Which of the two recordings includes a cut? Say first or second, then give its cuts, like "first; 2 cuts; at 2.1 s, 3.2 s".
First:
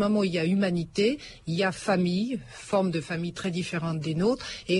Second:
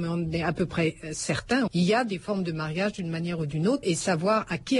second; 2 cuts; at 1.7 s, 3.8 s